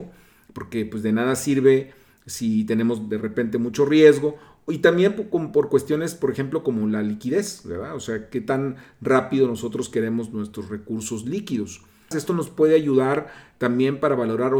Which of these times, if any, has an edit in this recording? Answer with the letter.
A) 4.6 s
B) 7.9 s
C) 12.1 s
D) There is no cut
C